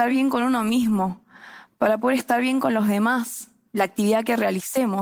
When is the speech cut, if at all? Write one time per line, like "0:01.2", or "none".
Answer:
0:03.7